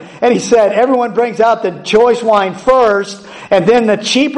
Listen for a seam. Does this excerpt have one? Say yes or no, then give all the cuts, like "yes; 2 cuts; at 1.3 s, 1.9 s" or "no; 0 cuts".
no; 0 cuts